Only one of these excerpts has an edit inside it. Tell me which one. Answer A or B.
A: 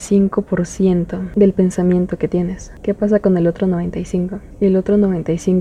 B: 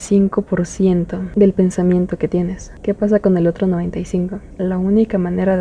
B